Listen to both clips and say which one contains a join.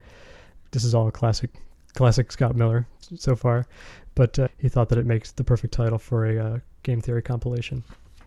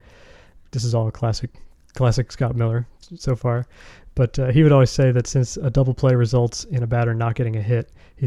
first; 1 cut; at 4.5 s

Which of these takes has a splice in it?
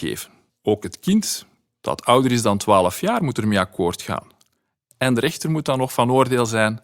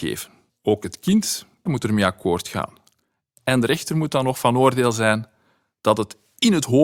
second; 1 cut; at 1.7 s

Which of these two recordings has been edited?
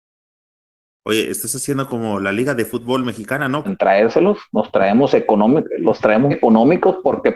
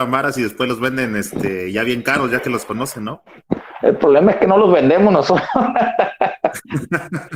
first; 2 cuts; at 3.6 s, 6.3 s

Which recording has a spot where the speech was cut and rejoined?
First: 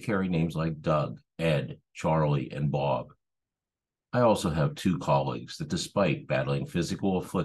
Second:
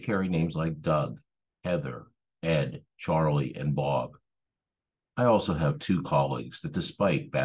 first; 1 cut; at 1.3 s

